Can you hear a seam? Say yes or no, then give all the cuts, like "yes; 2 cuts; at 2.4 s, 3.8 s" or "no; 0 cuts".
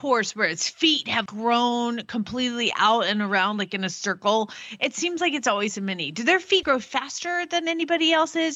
yes; 2 cuts; at 1.3 s, 6.6 s